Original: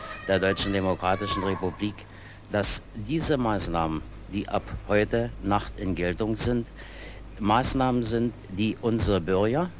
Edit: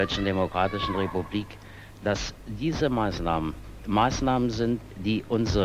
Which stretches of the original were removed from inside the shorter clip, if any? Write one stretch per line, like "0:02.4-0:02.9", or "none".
0:04.3-0:07.3